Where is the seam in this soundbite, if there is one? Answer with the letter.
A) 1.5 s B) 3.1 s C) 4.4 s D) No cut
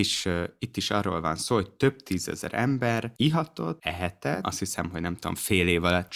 C